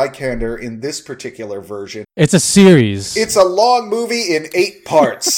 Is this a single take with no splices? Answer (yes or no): no